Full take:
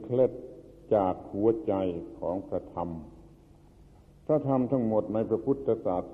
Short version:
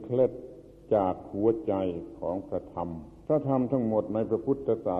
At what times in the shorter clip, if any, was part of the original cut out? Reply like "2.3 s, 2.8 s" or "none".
3.2 s